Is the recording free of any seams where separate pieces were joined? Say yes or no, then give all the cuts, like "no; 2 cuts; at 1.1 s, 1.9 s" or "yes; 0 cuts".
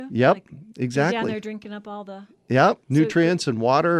no; 1 cut; at 2.8 s